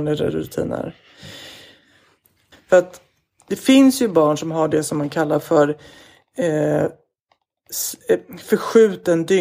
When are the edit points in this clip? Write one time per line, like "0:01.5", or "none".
0:02.5